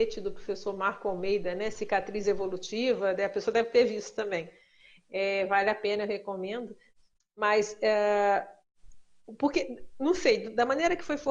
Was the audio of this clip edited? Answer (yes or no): no